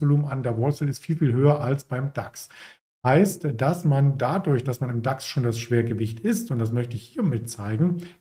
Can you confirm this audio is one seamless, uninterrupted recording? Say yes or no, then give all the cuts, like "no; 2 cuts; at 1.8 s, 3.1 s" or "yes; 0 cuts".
yes; 0 cuts